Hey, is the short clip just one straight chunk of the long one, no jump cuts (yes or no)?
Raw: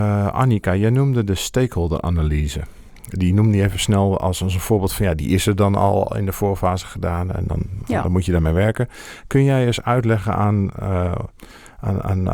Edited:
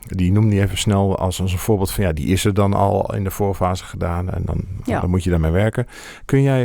yes